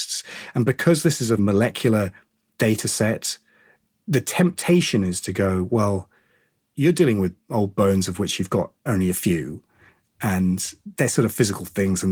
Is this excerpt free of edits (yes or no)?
no